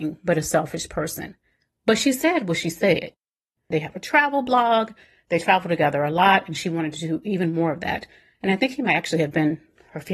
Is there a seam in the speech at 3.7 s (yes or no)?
yes